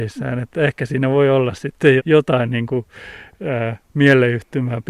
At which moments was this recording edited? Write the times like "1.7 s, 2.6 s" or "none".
2.0 s